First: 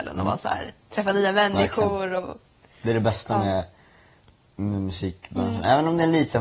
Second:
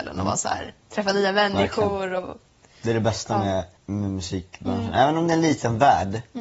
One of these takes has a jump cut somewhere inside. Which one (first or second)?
second